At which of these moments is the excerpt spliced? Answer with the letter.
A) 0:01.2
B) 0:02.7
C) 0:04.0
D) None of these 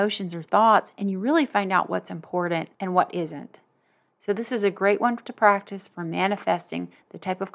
D